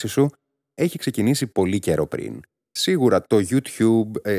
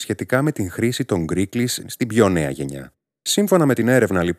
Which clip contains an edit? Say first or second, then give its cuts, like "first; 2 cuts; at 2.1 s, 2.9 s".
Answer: second; 1 cut; at 1.8 s